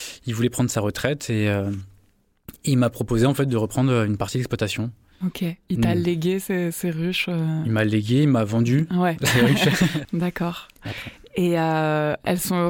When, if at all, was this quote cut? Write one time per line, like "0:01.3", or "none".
0:10.0